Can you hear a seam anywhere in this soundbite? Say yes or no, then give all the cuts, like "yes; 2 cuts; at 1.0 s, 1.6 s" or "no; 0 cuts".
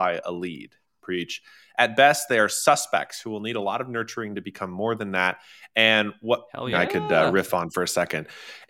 yes; 2 cuts; at 1.0 s, 6.7 s